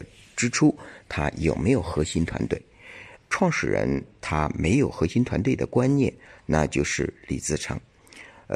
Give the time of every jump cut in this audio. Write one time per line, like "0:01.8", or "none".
0:03.2